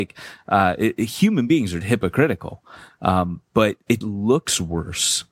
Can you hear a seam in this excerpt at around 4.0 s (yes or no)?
yes